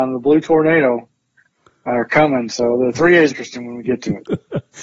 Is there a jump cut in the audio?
yes; 1 cut; at 3.3 s

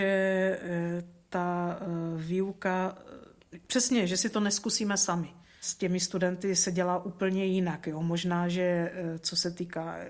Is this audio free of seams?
yes; 0 cuts

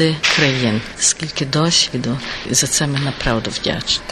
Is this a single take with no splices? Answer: no; 2 cuts; at 0.9 s, 2.5 s

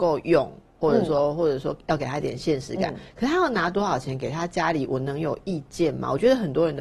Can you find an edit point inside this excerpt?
no; 0 cuts

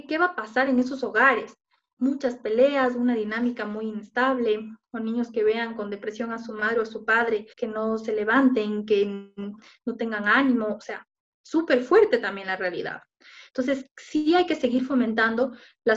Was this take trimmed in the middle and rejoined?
yes; 1 cut; at 7.5 s

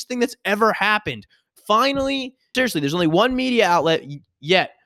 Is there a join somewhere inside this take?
yes; 1 cut; at 2.5 s

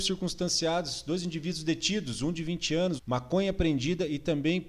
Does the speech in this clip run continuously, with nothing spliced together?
no; 1 cut; at 3.0 s

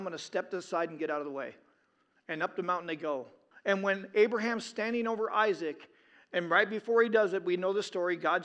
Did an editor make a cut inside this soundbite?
yes; 2 cuts; at 2.2 s, 3.5 s

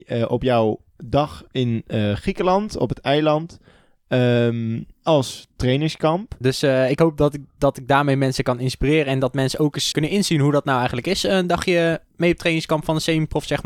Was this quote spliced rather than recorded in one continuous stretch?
yes; 3 cuts; at 4.9 s, 6.4 s, 9.9 s

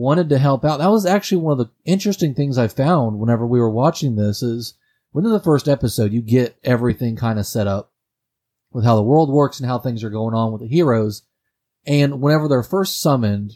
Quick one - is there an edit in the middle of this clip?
no; 0 cuts

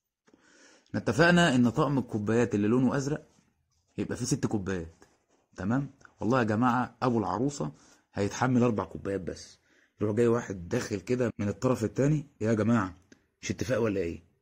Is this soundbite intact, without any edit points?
no; 1 cut; at 11.3 s

